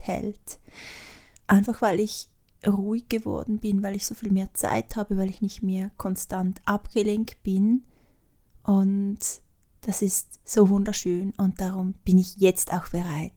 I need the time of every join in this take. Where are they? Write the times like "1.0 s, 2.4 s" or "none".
none